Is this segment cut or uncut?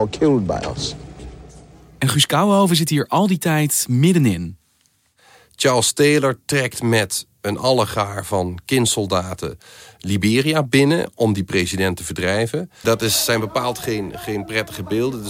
cut